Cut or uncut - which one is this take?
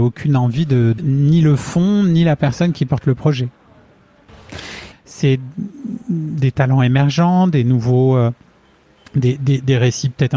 cut